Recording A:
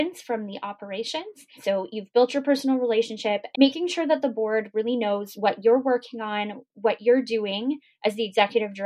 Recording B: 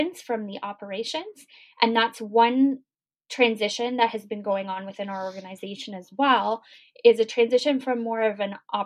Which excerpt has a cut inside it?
A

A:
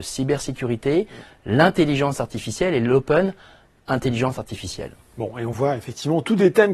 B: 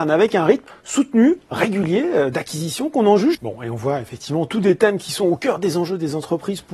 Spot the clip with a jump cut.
B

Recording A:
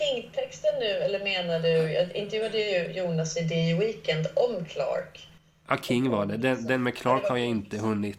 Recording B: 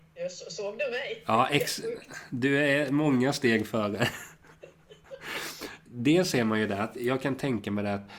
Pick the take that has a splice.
B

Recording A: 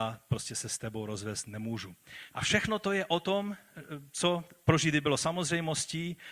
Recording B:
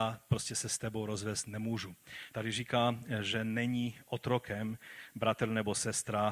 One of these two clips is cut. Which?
A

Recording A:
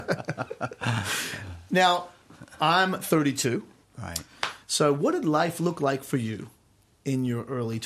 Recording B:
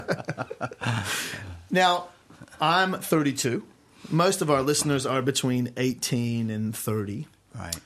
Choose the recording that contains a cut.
A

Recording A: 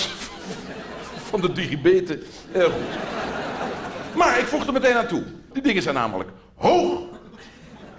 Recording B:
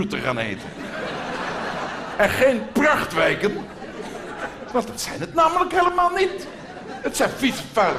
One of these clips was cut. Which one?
A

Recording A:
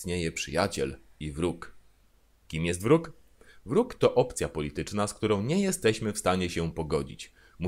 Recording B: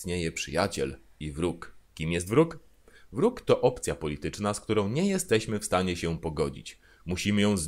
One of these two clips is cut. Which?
B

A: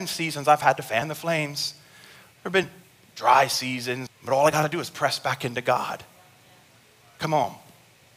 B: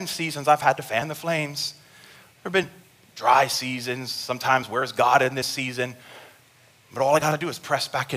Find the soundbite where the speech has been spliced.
A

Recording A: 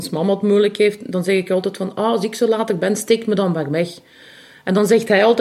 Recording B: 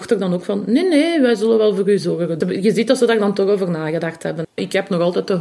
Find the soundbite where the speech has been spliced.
B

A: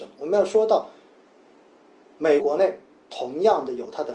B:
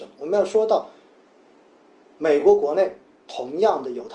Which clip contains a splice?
A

